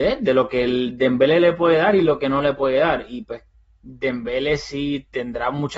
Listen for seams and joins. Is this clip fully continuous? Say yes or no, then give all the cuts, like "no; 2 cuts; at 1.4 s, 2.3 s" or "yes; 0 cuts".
yes; 0 cuts